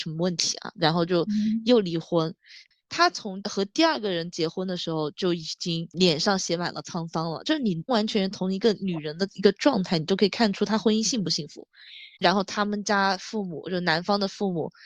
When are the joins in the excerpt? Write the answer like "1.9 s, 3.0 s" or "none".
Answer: 7.9 s, 12.2 s